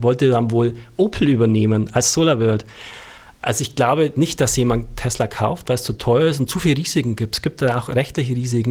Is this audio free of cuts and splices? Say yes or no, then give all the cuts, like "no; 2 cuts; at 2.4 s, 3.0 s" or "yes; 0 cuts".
yes; 0 cuts